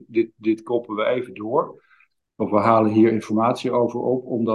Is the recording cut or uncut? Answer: uncut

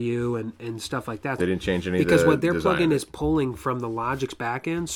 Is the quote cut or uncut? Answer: cut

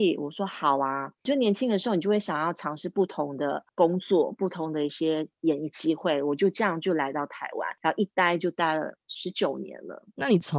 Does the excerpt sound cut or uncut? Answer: uncut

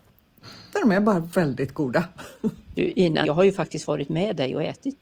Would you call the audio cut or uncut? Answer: cut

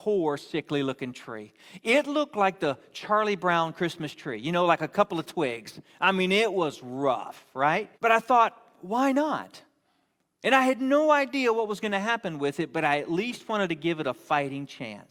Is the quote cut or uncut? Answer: cut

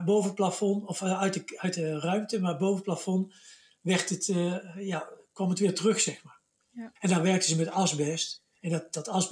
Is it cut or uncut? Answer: cut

